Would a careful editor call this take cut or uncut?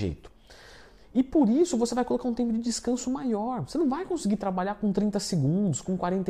uncut